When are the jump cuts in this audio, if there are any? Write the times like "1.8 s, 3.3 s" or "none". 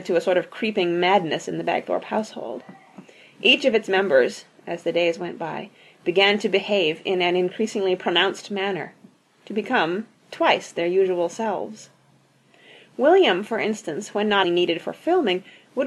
10.1 s, 14.4 s